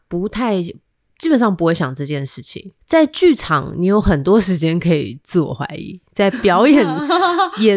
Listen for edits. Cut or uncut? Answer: cut